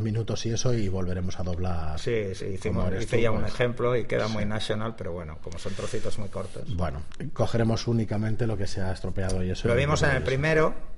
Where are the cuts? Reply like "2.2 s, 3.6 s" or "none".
none